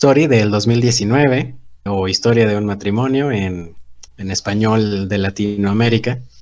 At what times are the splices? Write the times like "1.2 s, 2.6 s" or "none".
1.9 s, 4.1 s